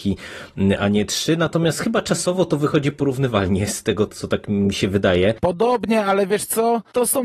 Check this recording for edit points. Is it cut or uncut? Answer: cut